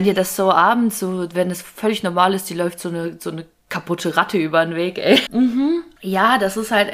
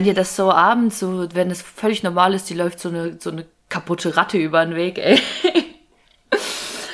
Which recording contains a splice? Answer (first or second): first